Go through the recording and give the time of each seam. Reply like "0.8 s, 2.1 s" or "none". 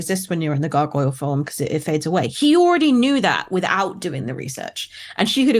none